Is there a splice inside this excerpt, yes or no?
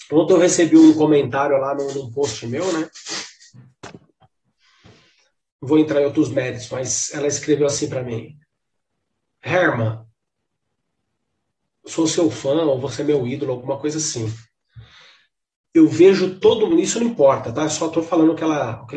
yes